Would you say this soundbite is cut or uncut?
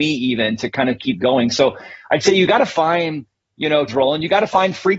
cut